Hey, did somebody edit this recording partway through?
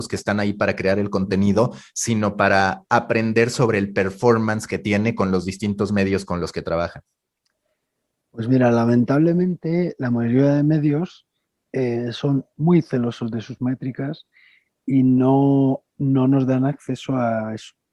no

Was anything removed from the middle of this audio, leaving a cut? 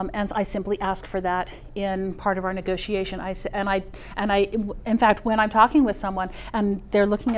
no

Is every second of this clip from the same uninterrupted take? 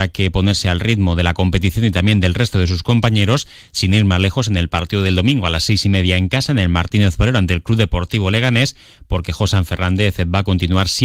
yes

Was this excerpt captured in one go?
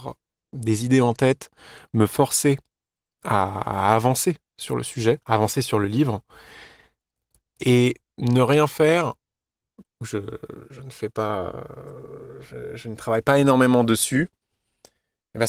no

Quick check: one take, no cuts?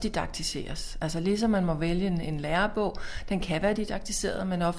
yes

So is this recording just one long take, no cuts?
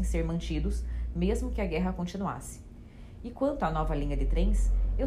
yes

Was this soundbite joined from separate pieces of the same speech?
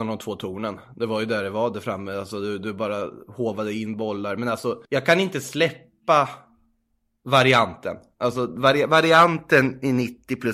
yes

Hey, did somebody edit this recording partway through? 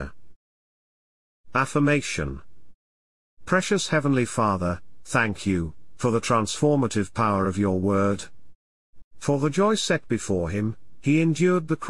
yes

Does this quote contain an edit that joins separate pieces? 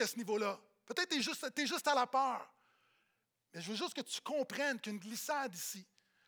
no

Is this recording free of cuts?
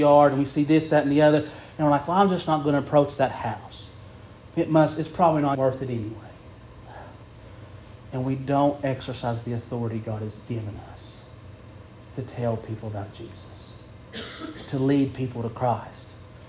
no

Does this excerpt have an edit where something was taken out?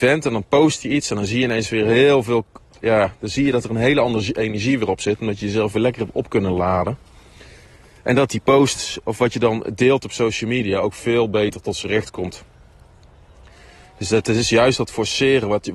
no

